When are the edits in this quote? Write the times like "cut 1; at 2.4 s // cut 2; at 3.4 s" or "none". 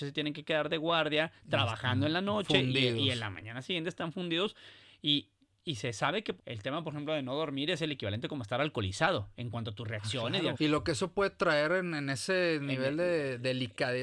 cut 1; at 6.4 s // cut 2; at 10.5 s